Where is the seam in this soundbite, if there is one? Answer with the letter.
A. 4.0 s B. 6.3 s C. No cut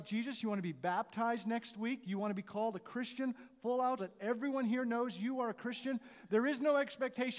A